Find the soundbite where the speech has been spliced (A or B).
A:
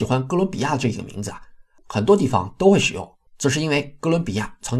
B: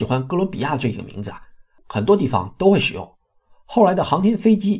A